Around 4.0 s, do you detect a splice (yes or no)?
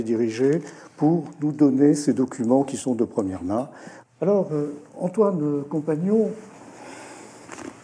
yes